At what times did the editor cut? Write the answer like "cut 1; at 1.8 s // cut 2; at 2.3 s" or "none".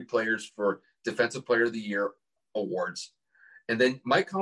cut 1; at 2.4 s